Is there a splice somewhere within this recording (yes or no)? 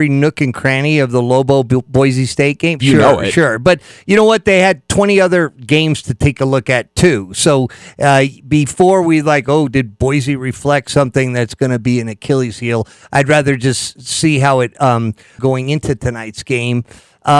yes